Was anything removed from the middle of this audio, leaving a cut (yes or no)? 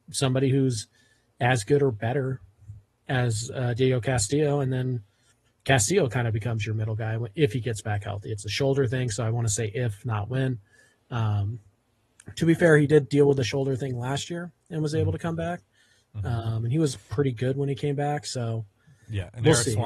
no